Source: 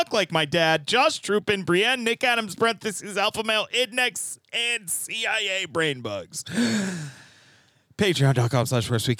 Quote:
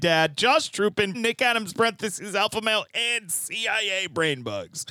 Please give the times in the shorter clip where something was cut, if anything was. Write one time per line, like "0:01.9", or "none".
0:01.1
0:02.9